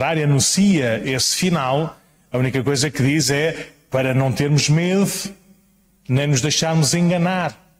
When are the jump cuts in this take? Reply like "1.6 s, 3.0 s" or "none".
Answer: 1.0 s